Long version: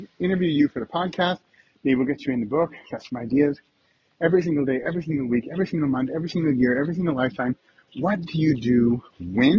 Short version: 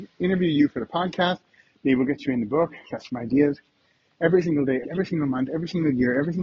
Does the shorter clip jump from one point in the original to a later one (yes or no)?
yes